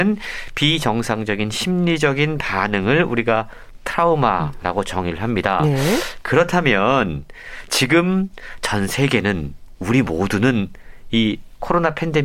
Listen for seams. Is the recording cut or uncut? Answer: uncut